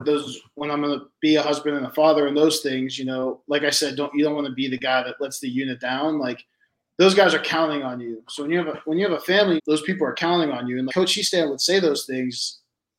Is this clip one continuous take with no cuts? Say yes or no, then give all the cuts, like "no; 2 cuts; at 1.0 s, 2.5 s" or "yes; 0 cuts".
no; 2 cuts; at 9.6 s, 10.9 s